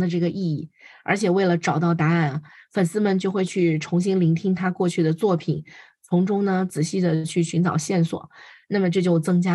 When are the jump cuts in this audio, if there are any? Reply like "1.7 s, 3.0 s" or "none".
none